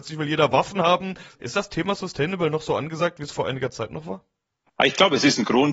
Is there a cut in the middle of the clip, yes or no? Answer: yes